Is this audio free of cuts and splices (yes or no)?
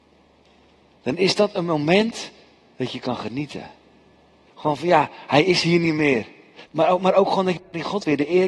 no